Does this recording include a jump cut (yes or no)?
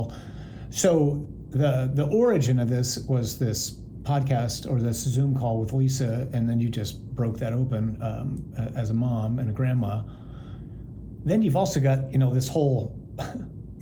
no